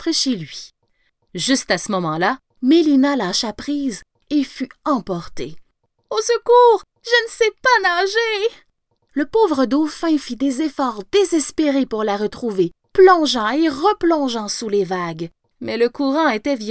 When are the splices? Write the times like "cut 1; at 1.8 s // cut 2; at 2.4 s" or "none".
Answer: cut 1; at 2.5 s